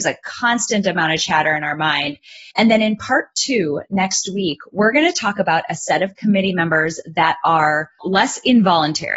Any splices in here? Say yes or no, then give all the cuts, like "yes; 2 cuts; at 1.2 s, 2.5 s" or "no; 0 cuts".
yes; 2 cuts; at 2.5 s, 8.0 s